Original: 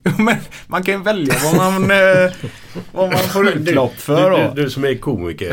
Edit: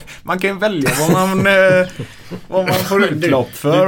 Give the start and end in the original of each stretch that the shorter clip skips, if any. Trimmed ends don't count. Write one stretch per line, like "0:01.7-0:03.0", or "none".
none

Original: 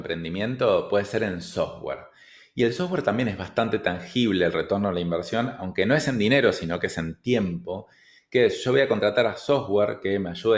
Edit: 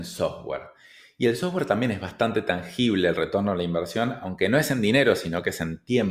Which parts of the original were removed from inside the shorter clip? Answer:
none

